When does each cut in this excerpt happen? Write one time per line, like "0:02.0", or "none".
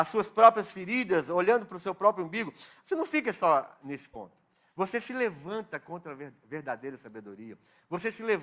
none